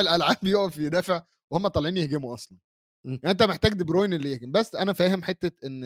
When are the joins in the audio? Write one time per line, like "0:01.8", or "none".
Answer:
none